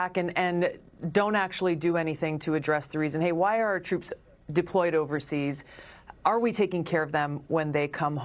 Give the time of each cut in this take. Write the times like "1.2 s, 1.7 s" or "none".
none